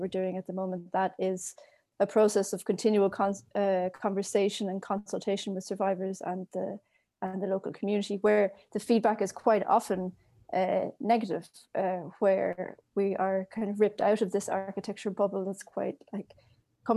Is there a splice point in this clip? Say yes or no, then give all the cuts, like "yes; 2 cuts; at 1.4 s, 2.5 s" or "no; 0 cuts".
no; 0 cuts